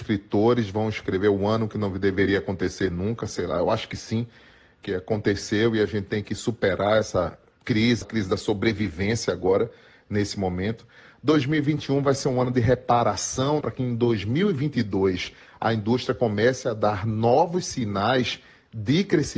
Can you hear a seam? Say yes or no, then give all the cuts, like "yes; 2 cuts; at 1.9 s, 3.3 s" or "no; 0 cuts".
yes; 2 cuts; at 8.0 s, 13.6 s